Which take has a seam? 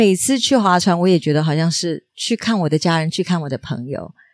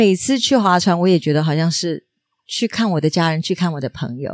first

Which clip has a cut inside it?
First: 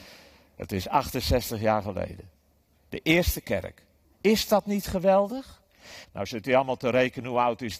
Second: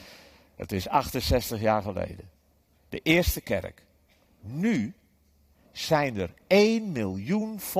first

